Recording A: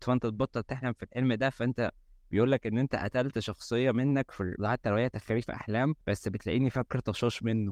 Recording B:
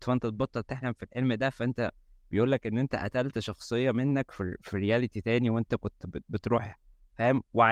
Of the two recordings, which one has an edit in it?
A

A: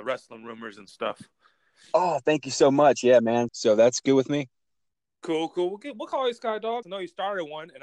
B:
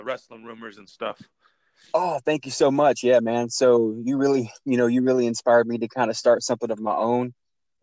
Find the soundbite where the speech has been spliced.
A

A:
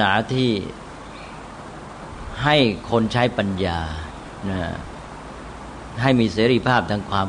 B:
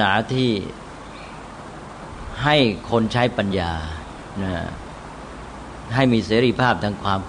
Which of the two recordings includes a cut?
B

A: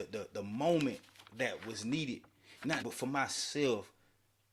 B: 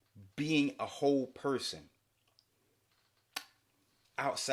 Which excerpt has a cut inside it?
A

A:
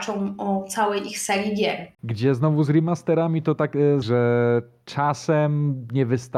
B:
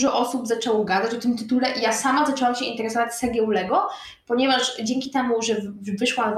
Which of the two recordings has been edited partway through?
A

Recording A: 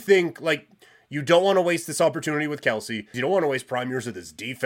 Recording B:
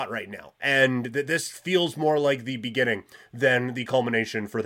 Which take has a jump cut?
A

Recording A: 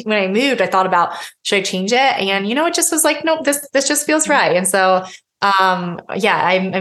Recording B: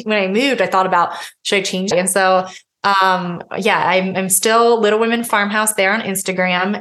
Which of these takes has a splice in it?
B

